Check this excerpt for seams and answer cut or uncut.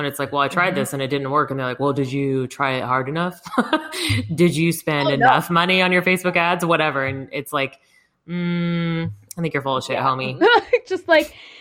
cut